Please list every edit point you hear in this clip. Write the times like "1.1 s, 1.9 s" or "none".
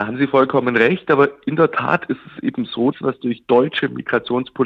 2.9 s